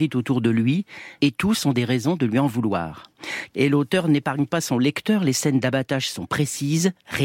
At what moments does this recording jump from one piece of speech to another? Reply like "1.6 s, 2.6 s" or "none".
3.5 s